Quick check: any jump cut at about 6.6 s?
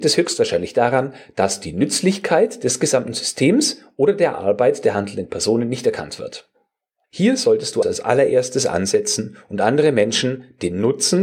no; 1 cut; at 7.8 s

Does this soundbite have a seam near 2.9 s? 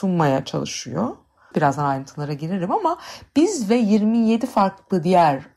no; 1 cut; at 1.5 s

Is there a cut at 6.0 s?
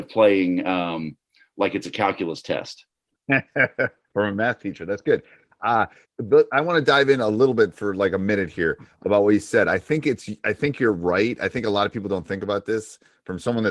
yes; 1 cut; at 6.0 s

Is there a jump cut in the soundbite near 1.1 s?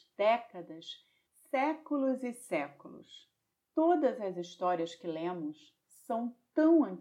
no; 1 cut; at 3.5 s

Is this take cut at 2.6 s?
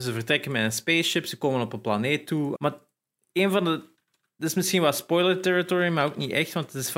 yes; 1 cut; at 2.6 s

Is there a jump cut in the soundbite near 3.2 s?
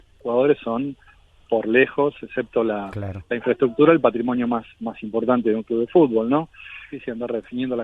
no; 1 cut; at 6.9 s

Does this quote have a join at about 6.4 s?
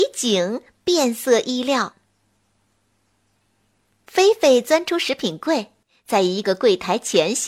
yes; 2 cuts; at 1.9 s, 6.4 s

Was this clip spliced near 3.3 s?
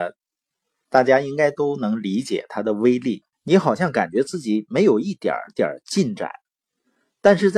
yes; 1 cut; at 3.3 s

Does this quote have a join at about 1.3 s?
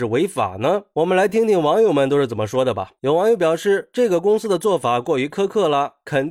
no; 0 cuts

